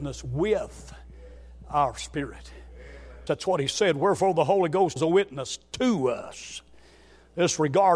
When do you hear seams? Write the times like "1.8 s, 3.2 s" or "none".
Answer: 3.3 s, 5.0 s